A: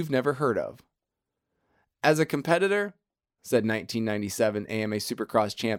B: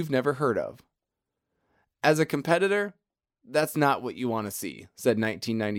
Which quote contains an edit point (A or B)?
A